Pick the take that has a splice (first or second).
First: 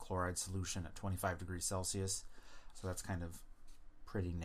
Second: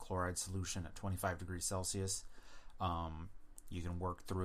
first